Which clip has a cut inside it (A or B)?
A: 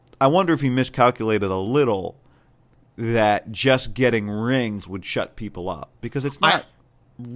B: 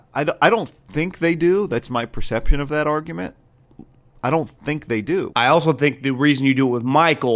B